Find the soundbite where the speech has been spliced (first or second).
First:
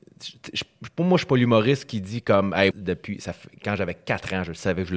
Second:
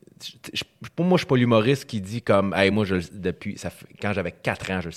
first